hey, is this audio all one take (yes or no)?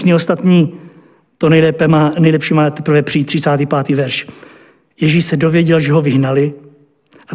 yes